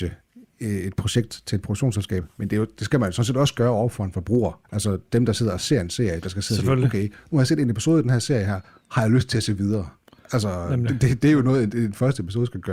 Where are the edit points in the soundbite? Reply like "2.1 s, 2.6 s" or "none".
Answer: 4.6 s